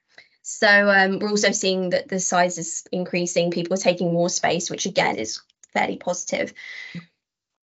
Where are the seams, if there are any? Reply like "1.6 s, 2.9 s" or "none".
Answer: 2.8 s, 5.1 s